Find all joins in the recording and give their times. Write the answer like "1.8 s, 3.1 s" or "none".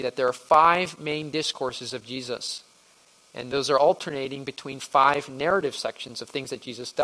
none